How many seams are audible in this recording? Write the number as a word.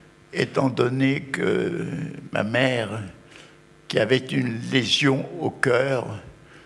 zero